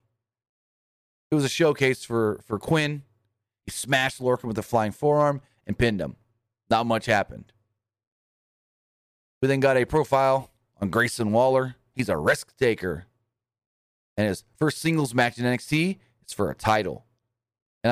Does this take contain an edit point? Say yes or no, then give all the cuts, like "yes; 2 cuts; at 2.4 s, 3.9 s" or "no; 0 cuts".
no; 0 cuts